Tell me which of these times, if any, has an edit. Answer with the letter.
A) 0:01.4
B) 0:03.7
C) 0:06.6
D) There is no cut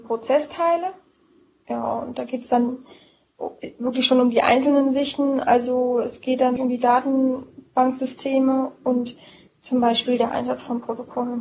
C